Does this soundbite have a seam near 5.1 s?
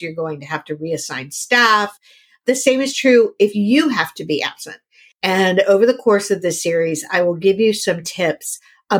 yes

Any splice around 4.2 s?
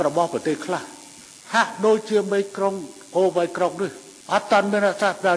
yes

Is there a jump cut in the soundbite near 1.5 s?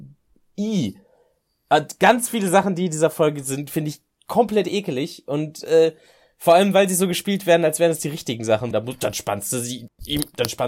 no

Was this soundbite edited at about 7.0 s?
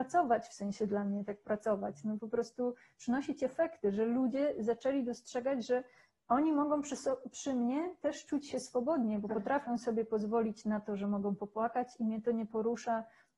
no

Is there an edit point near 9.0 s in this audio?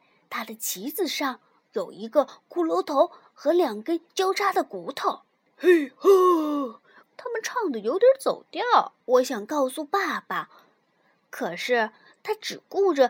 yes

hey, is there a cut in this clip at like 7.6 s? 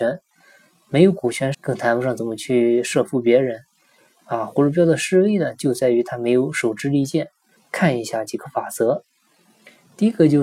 yes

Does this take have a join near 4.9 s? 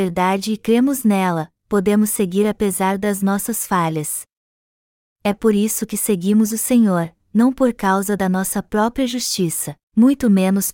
no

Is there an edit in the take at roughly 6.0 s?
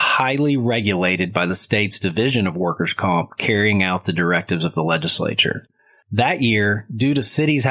yes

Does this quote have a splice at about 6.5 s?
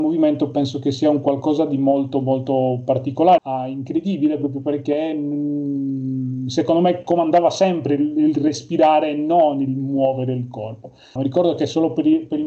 no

